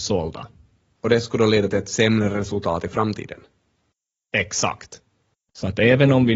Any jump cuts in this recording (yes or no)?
yes